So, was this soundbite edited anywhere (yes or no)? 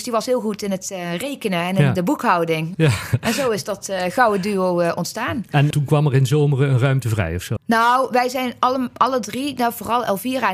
yes